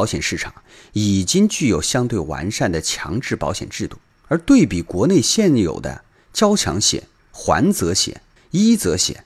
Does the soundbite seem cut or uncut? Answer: uncut